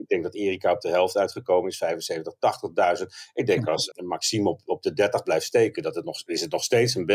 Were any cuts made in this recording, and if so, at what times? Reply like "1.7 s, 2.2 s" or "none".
3.9 s